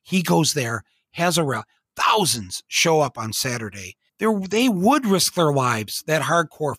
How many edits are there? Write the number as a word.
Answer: one